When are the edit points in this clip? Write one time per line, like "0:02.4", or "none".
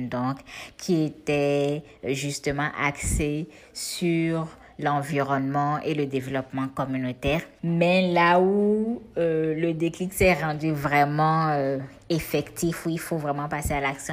0:07.6